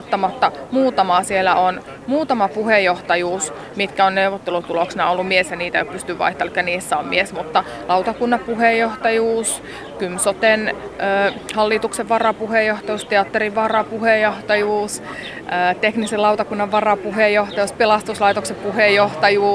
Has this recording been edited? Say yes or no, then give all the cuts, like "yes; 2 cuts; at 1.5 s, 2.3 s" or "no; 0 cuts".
no; 0 cuts